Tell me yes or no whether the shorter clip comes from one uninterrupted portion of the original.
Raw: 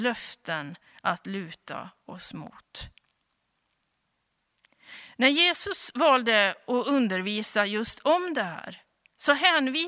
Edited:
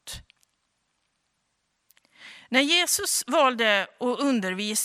yes